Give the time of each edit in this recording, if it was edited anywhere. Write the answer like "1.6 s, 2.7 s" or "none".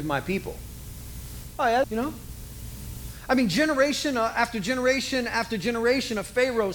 1.8 s